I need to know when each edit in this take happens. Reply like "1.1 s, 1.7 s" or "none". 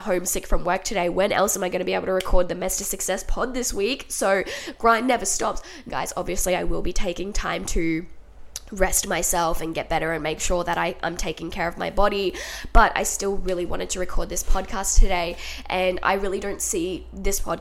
5.9 s

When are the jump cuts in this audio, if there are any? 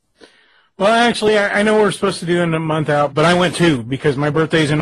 3.1 s

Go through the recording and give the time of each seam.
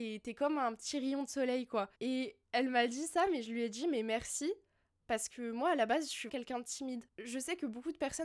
1.9 s, 6.3 s

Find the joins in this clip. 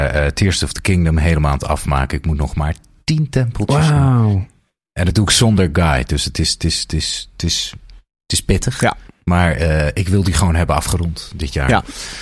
none

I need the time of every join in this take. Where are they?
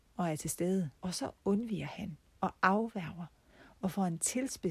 1.0 s

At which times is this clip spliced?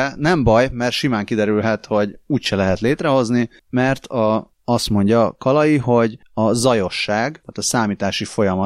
none

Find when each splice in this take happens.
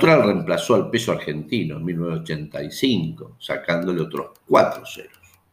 none

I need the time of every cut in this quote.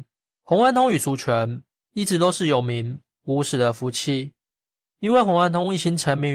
none

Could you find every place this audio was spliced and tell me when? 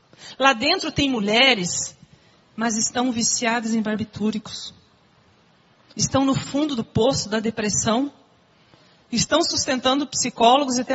2.5 s

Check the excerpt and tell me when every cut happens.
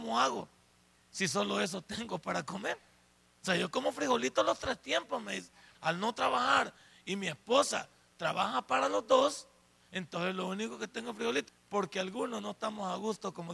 5.7 s, 11.5 s

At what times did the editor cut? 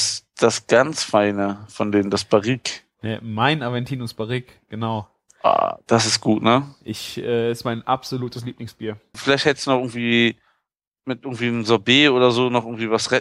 9.1 s

